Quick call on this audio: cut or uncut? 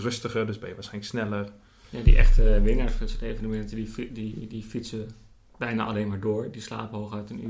uncut